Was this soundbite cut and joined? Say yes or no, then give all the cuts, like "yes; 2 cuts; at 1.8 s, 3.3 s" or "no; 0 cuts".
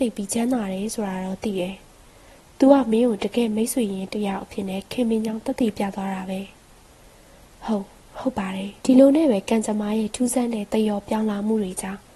yes; 1 cut; at 8.8 s